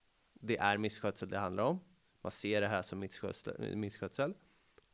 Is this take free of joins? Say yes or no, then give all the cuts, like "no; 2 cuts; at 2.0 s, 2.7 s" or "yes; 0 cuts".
yes; 0 cuts